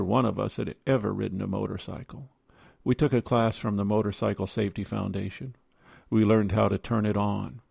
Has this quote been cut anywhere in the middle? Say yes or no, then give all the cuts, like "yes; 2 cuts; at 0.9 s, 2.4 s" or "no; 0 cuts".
no; 0 cuts